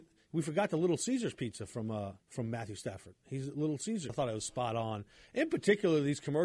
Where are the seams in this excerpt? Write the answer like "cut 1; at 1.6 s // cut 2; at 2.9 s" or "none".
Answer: cut 1; at 2.2 s // cut 2; at 4.1 s